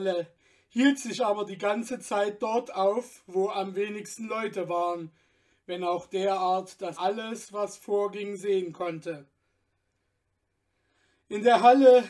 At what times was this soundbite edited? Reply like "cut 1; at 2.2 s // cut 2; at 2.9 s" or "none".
cut 1; at 7.0 s